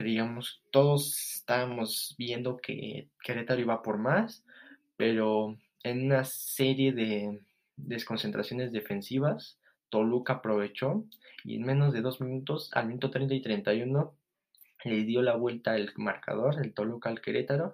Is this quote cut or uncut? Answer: uncut